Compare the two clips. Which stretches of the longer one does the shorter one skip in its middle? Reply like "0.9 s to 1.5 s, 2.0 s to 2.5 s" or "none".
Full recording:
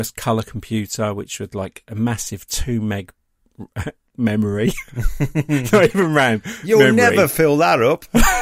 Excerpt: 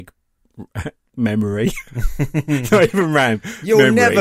none